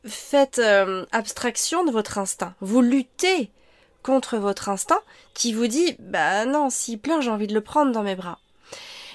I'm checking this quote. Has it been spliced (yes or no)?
no